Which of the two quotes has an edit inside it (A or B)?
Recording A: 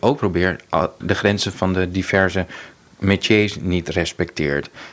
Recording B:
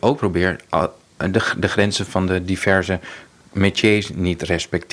A